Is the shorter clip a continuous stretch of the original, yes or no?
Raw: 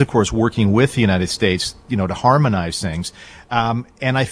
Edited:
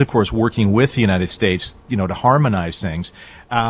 yes